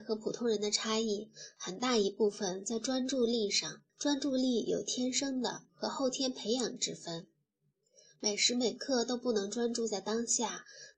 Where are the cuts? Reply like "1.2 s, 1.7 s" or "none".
3.9 s